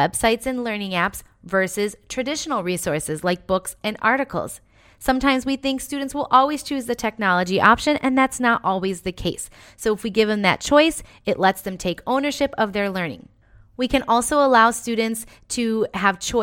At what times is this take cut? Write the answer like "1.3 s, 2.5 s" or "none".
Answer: none